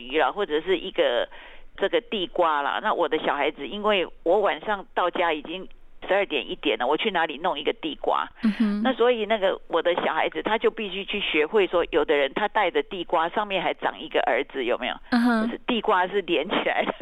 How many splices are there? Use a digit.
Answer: 0